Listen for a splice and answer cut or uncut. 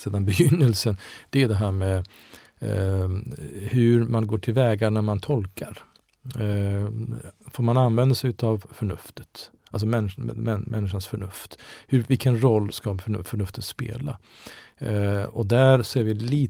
uncut